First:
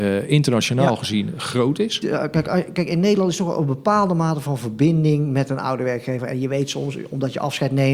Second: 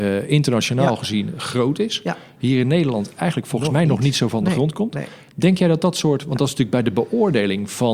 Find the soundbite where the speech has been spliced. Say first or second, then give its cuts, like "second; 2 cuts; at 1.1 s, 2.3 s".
first; 1 cut; at 2.0 s